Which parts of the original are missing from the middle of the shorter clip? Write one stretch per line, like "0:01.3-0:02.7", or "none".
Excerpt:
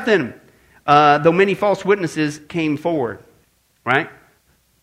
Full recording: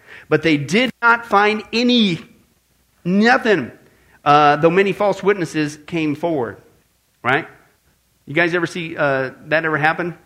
none